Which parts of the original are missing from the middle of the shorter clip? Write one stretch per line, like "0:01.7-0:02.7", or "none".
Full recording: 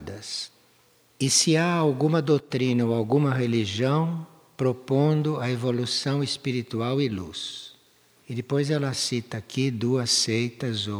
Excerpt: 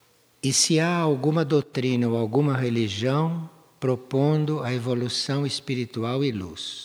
none